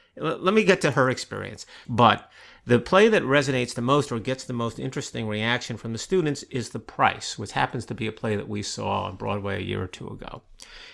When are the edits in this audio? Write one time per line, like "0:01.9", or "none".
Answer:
0:01.8